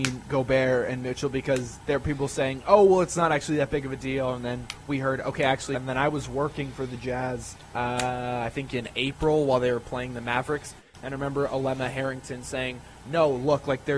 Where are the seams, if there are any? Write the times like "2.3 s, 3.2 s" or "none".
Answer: 5.7 s, 7.7 s